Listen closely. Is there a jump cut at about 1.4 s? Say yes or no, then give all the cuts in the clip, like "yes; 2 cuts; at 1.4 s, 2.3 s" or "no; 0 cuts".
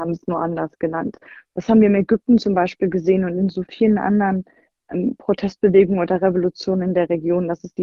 yes; 1 cut; at 1.4 s